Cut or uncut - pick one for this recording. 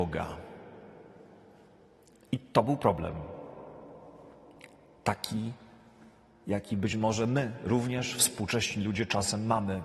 uncut